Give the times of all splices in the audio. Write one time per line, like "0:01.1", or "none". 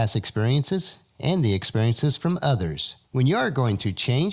0:03.0